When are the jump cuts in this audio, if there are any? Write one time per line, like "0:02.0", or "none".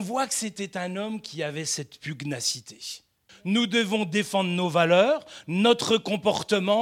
0:03.3